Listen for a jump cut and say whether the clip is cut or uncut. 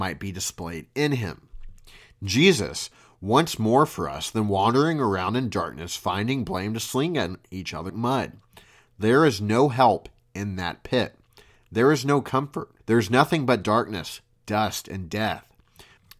cut